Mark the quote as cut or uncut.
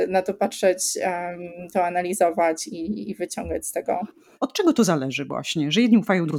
cut